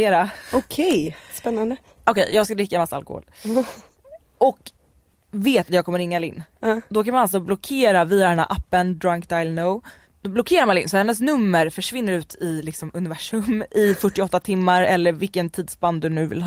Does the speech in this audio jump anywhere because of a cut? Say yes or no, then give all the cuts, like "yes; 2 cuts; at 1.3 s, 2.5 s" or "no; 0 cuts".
no; 0 cuts